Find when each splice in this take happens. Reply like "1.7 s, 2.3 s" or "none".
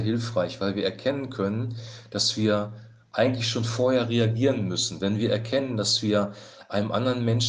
none

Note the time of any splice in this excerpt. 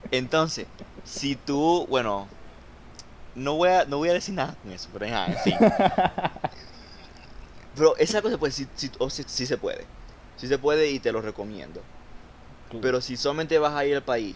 9.2 s

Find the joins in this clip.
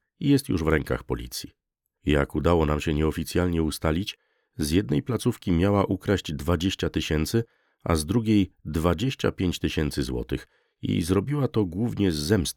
none

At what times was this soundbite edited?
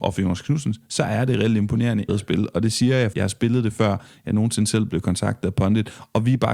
2.1 s, 3.1 s

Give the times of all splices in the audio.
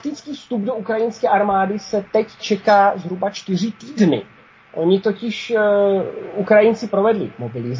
none

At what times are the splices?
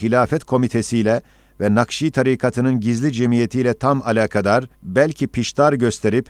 4.7 s

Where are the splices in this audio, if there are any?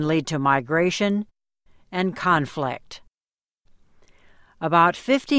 none

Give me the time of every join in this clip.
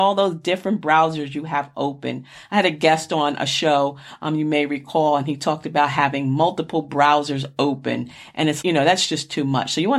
8.6 s

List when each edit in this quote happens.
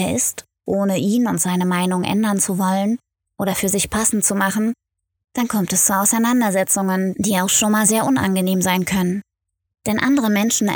none

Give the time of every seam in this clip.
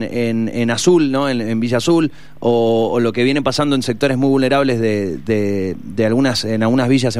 none

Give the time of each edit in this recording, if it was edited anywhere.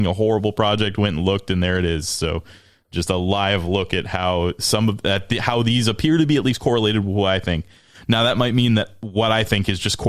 none

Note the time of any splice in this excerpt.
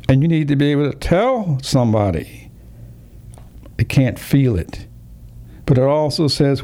3.7 s, 5.6 s

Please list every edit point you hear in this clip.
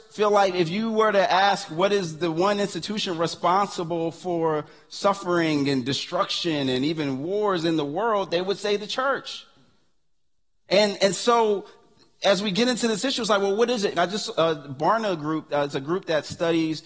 10.7 s, 13.9 s

